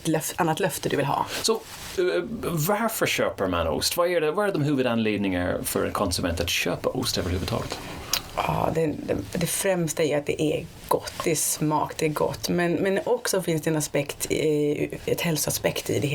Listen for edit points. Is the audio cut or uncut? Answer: uncut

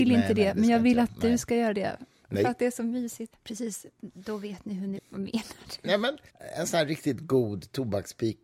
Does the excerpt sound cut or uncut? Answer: cut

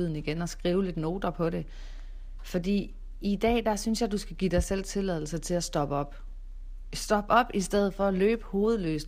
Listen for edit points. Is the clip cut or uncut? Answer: uncut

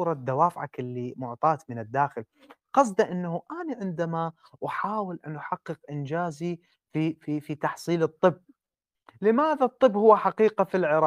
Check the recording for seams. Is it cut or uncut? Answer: uncut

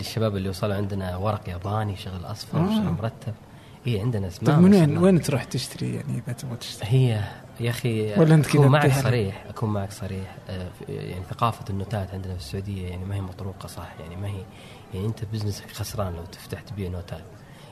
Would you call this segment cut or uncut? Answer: uncut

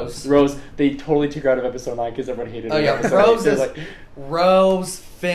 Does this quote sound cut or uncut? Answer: uncut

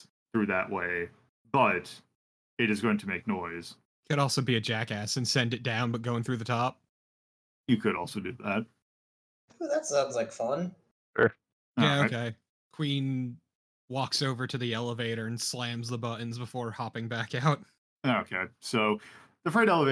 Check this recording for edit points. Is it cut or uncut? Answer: uncut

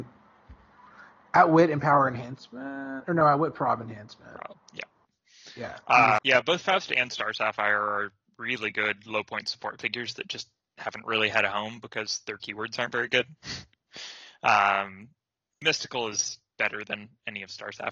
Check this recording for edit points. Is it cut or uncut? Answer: cut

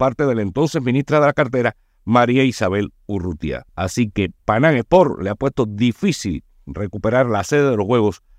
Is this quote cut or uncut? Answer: cut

